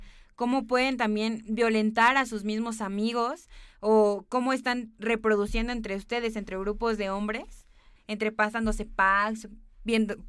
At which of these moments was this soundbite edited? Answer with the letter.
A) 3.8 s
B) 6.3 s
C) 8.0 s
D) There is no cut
C